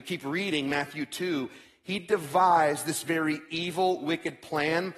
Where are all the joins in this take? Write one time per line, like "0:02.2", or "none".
none